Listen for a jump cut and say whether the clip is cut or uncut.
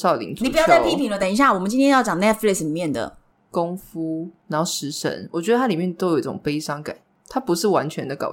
uncut